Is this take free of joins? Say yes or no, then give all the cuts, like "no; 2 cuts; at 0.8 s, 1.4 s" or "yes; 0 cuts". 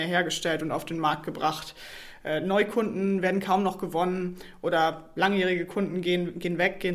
yes; 0 cuts